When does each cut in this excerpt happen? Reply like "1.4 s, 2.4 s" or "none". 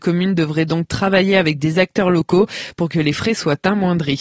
none